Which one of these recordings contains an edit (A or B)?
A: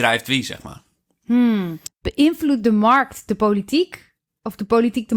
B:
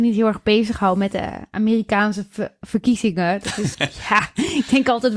B